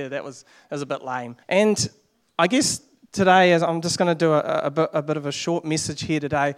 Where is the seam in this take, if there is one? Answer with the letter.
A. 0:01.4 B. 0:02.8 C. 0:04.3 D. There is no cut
A